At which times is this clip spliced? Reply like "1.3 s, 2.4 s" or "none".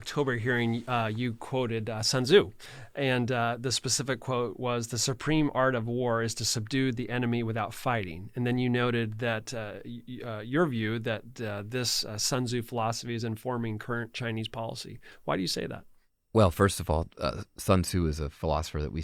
none